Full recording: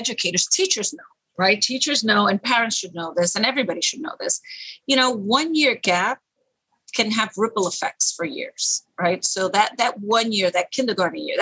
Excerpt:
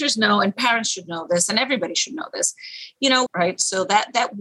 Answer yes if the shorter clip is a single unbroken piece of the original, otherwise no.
no